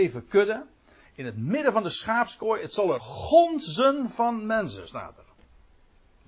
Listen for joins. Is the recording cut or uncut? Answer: cut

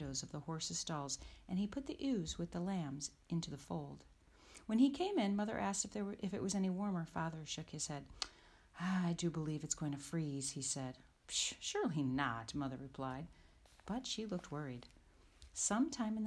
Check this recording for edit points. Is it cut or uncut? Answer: uncut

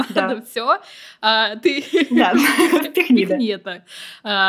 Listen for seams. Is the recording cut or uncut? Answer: uncut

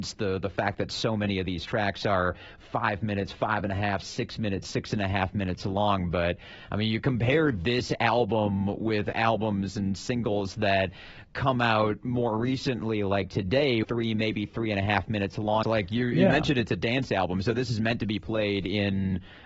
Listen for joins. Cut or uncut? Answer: cut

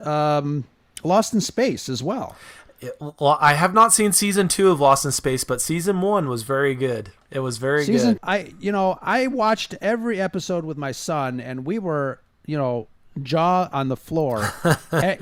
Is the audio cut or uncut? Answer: cut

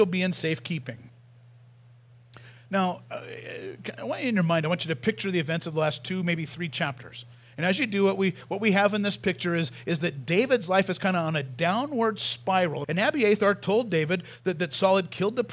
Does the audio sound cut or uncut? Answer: cut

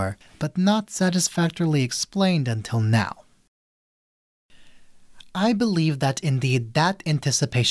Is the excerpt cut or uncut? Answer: uncut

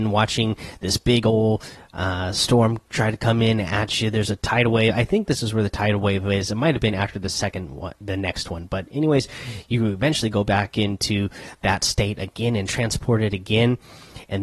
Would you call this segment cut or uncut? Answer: uncut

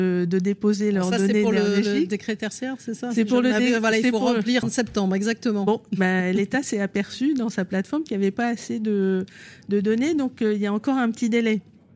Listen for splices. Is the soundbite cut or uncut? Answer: cut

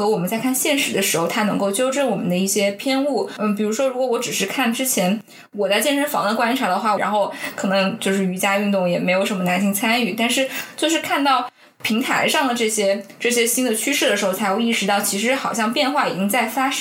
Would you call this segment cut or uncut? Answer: cut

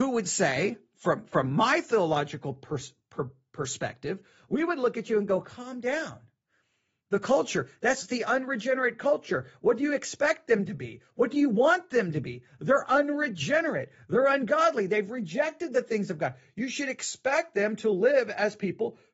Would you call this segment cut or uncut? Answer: uncut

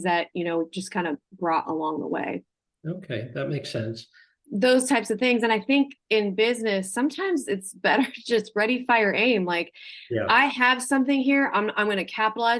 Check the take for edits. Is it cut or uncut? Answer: cut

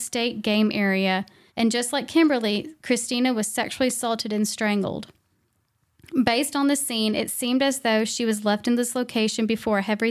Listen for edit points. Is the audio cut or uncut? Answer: cut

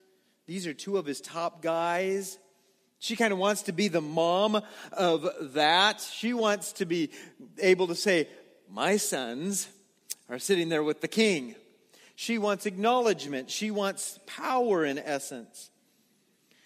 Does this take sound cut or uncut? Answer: uncut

